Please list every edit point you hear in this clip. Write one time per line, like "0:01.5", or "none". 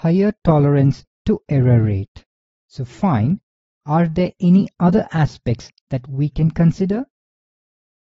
0:02.6